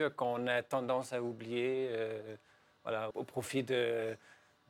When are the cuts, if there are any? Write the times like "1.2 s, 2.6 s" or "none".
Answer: 3.1 s